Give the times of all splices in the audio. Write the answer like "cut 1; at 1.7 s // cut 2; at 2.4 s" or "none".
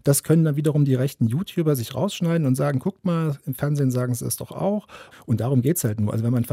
cut 1; at 5.1 s